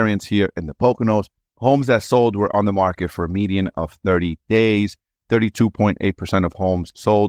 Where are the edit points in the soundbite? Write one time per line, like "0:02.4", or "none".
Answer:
none